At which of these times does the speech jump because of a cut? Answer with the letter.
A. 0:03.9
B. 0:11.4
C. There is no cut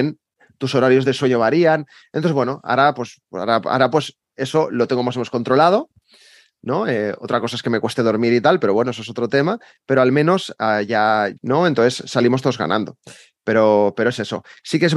B